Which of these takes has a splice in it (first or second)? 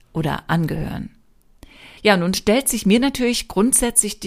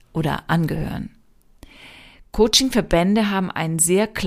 first